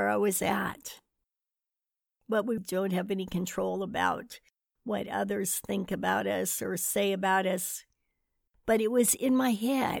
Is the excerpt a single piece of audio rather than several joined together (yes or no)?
no